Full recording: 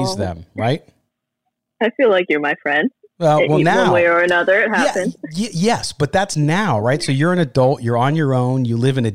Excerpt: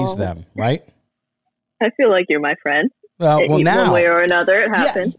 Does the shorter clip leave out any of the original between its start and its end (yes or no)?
no